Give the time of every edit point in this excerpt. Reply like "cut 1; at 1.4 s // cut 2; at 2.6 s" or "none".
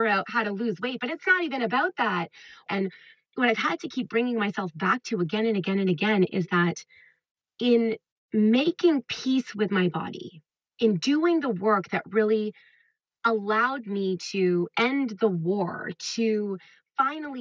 cut 1; at 2.7 s